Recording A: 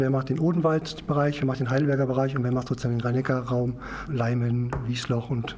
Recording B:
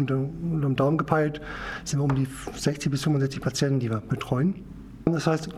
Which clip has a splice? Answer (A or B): A